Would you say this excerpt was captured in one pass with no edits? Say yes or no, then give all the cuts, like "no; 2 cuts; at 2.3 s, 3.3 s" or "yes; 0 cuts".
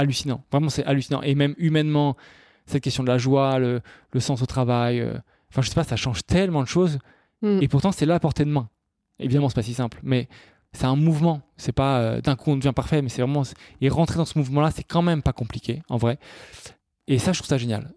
yes; 0 cuts